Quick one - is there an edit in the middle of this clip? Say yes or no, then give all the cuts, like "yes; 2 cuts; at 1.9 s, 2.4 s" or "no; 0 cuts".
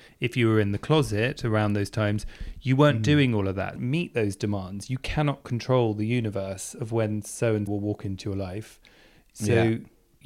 yes; 2 cuts; at 3.8 s, 7.7 s